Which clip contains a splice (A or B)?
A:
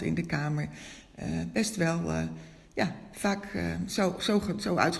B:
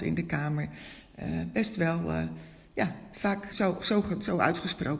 B